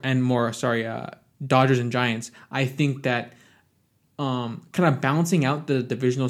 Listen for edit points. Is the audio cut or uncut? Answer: uncut